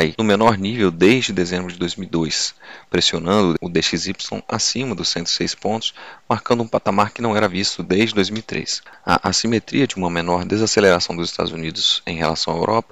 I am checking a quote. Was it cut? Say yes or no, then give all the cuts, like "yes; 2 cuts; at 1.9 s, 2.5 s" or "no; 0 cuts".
no; 0 cuts